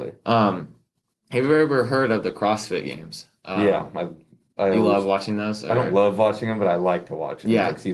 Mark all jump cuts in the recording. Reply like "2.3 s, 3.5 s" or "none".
none